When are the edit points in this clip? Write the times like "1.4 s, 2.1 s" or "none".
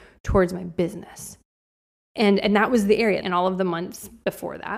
2.1 s, 3.2 s